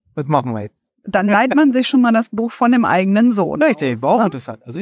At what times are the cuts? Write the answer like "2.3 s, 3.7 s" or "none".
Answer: none